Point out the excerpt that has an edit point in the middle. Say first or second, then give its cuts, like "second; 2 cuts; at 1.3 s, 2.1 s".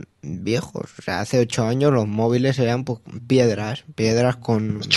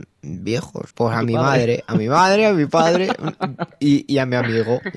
second; 1 cut; at 0.9 s